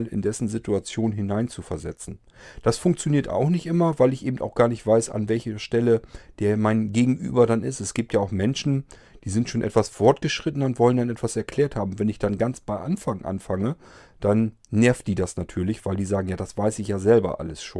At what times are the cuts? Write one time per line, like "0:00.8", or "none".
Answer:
none